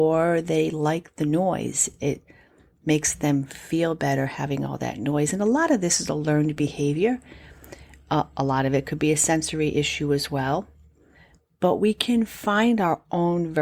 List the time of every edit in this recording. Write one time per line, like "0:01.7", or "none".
none